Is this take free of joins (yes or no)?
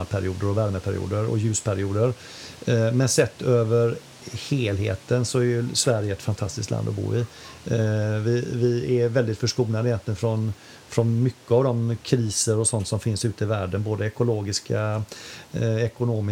yes